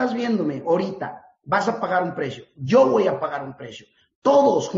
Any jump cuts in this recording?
no; 0 cuts

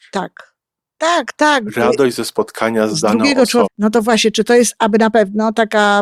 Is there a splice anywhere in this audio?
yes; 1 cut; at 3.6 s

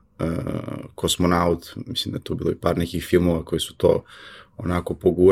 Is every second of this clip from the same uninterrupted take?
yes; 0 cuts

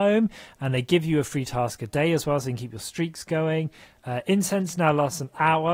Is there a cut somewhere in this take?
no; 0 cuts

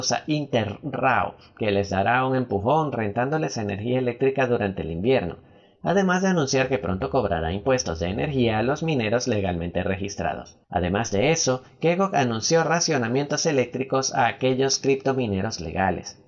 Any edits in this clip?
yes; 1 cut; at 10.6 s

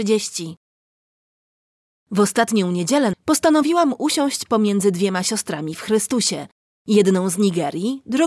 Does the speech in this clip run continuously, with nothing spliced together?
no; 2 cuts; at 2.0 s, 3.1 s

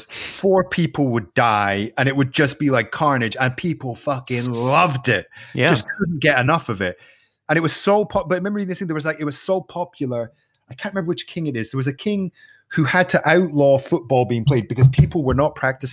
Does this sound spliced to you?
no; 0 cuts

